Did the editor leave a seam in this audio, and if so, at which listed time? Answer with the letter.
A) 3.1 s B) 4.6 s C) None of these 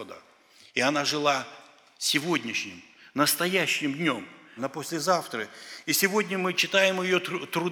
B